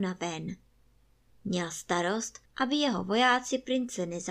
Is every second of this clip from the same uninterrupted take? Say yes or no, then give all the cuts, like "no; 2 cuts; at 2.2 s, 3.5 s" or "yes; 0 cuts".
no; 2 cuts; at 1.3 s, 2.5 s